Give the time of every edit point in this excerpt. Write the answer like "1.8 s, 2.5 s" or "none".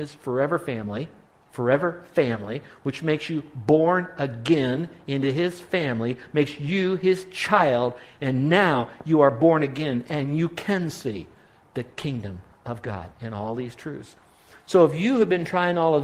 none